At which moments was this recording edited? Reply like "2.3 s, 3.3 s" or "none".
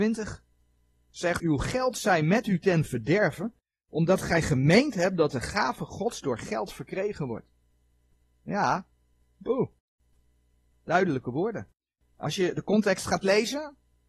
1.4 s